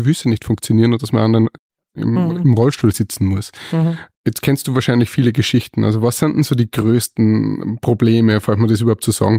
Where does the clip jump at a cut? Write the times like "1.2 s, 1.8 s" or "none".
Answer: 4.1 s